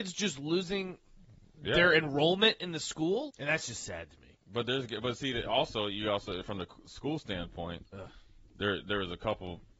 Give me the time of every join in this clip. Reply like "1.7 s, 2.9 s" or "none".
3.3 s